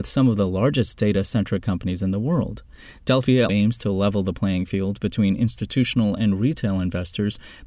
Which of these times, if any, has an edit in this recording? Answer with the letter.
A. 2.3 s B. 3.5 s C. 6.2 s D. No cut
B